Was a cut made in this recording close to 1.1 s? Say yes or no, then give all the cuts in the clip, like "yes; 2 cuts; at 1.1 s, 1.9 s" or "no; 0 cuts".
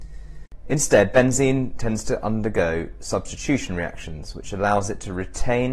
no; 0 cuts